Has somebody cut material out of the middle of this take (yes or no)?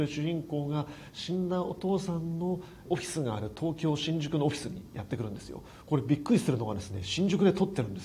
yes